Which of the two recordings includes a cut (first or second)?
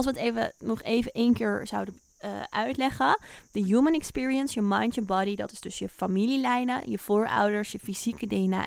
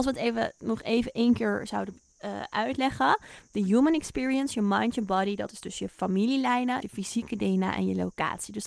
second